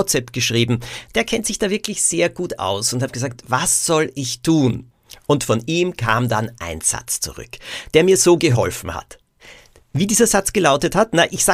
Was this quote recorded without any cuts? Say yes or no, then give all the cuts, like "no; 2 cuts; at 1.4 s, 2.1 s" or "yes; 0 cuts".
yes; 0 cuts